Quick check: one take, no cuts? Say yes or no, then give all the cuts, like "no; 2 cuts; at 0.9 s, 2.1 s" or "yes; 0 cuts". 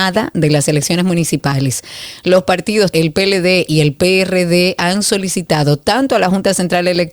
no; 1 cut; at 2.9 s